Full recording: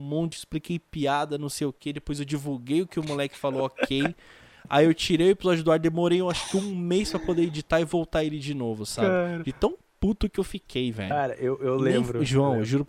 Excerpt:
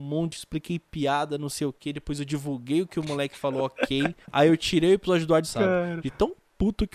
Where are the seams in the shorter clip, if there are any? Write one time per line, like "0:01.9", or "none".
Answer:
0:04.2
0:05.4